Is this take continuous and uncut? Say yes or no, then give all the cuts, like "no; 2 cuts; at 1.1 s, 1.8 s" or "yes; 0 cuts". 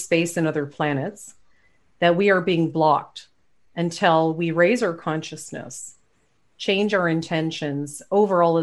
yes; 0 cuts